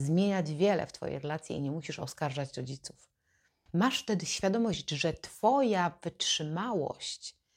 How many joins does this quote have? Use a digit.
1